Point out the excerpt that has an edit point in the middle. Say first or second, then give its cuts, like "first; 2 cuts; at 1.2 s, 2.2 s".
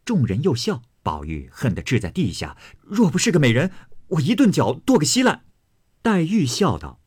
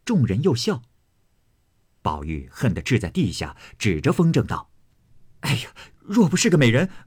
first; 3 cuts; at 0.9 s, 2.7 s, 5.5 s